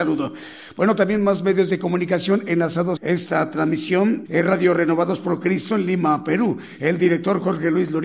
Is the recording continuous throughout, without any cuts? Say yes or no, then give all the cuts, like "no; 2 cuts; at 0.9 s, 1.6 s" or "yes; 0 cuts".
no; 2 cuts; at 3.0 s, 4.3 s